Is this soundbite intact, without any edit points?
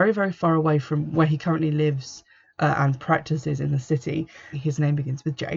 no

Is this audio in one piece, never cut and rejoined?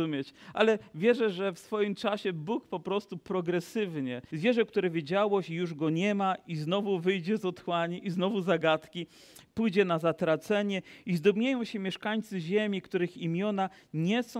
no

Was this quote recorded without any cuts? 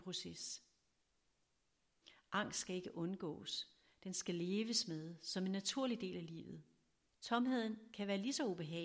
no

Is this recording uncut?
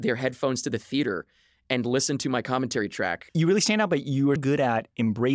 no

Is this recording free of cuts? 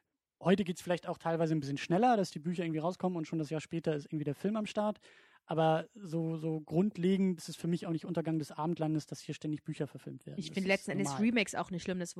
no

